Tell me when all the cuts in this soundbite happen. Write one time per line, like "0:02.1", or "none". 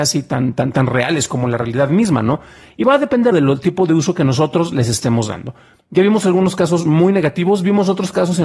0:03.3